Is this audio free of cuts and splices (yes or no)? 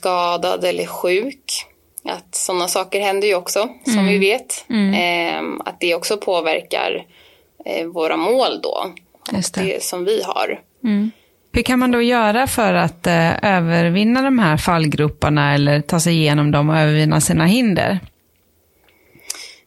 yes